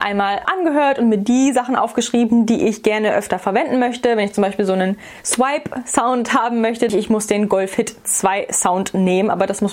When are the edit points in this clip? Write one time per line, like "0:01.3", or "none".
0:06.9